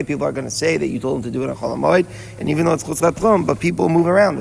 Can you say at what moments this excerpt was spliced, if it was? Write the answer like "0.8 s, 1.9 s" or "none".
none

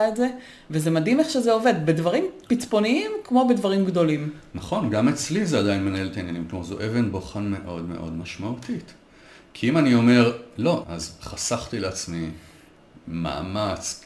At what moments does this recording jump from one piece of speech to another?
10.8 s

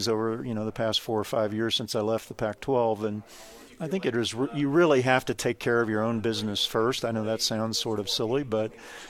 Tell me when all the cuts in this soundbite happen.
none

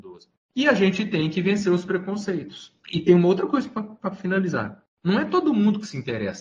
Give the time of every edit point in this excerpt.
2.8 s

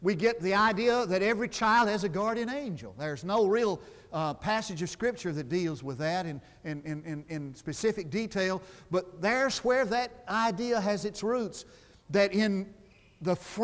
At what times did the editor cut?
none

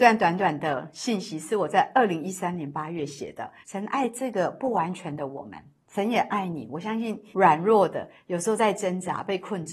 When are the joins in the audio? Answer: 3.6 s, 7.3 s

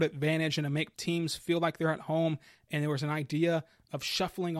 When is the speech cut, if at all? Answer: 0.9 s

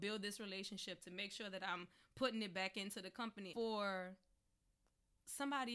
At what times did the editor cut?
3.5 s

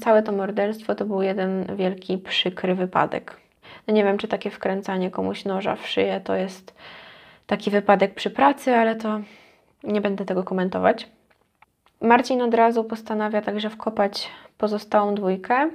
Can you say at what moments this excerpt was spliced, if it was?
none

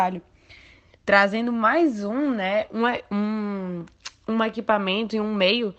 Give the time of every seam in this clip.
none

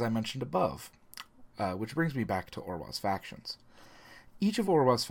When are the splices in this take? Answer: 1.5 s

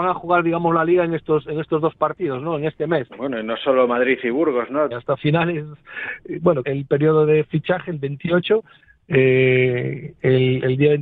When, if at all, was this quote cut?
3.1 s, 4.9 s, 6.6 s

